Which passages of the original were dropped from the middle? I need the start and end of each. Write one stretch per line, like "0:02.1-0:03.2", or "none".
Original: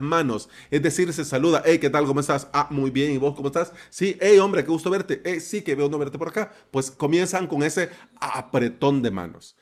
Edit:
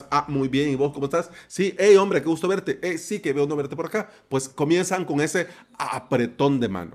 none